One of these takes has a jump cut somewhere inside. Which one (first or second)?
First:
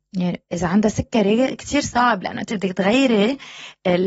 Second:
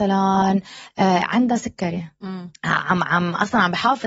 second